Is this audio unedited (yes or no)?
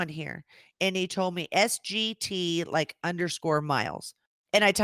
yes